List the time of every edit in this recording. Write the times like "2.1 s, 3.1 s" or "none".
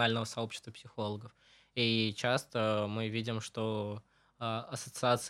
none